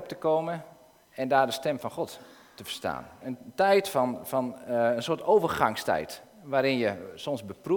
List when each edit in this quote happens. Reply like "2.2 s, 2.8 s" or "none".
3.2 s